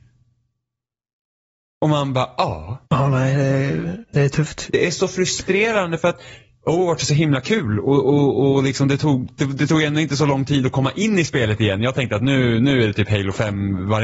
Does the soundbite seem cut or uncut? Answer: cut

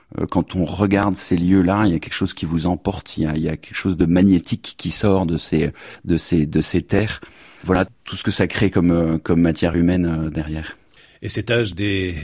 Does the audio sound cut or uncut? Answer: cut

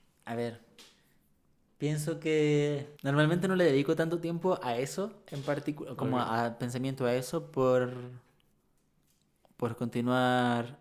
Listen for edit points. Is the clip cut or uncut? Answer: cut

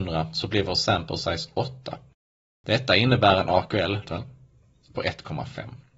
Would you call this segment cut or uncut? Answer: cut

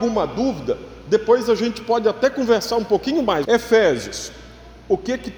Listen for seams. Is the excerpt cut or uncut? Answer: cut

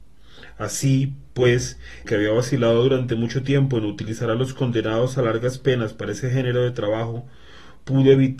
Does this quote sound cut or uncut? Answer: cut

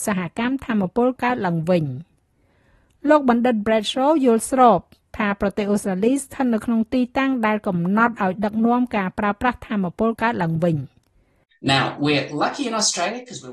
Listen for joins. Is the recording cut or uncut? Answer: cut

